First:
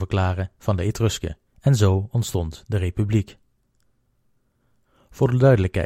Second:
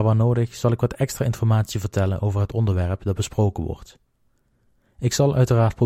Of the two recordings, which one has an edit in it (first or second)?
first